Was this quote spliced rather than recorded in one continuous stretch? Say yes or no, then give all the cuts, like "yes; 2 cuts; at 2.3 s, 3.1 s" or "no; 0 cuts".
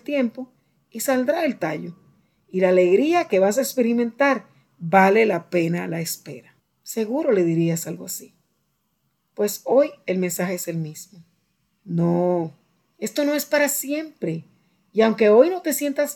yes; 1 cut; at 11.8 s